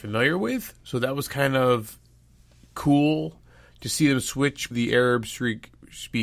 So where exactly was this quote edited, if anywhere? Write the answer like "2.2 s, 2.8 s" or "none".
4.7 s